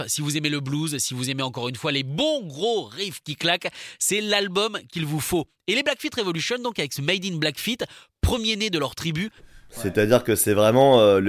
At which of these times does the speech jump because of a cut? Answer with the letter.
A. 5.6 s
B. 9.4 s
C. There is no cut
B